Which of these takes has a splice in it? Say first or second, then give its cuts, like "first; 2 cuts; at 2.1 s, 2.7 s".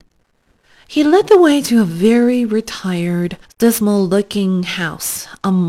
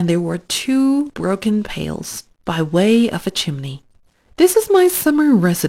second; 1 cut; at 2.4 s